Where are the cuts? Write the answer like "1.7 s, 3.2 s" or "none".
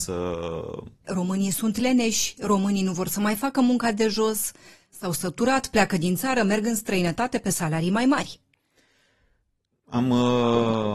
1.0 s